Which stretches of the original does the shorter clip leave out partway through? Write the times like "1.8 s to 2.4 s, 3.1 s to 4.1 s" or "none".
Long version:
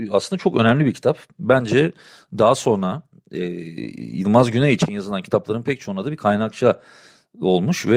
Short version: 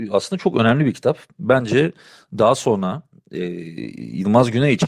none